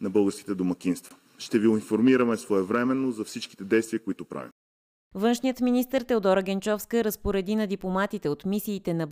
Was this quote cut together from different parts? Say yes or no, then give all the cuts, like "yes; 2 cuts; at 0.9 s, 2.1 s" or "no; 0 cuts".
no; 0 cuts